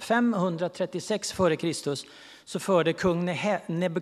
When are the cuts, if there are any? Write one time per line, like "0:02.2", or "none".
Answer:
none